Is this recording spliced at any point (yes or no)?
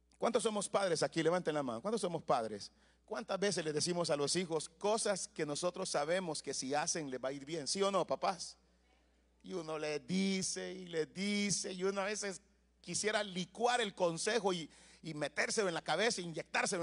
no